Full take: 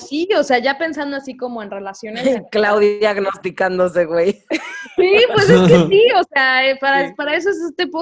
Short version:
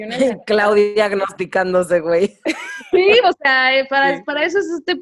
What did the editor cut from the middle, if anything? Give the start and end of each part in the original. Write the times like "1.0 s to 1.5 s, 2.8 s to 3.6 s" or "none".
5.3 s to 6.1 s